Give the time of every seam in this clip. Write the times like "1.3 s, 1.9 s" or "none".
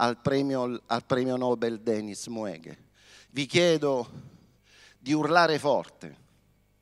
none